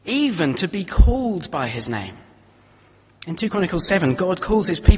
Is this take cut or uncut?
uncut